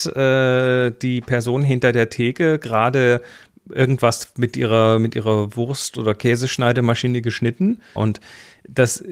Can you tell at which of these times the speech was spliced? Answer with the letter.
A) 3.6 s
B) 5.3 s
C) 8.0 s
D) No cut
C